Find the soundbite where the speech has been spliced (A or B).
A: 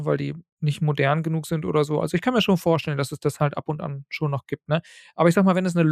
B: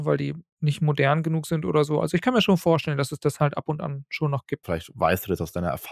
B